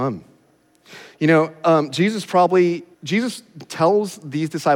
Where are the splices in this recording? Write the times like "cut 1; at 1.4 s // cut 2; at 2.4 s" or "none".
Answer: cut 1; at 2.9 s